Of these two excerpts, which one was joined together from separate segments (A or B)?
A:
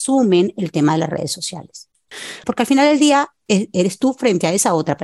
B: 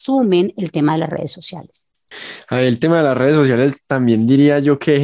A